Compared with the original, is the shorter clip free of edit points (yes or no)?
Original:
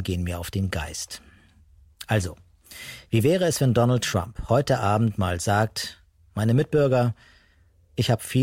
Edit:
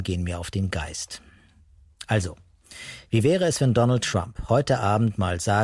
yes